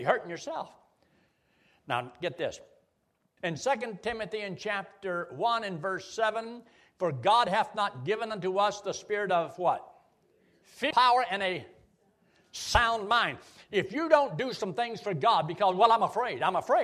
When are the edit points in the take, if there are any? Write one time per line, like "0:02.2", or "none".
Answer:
0:03.4
0:10.9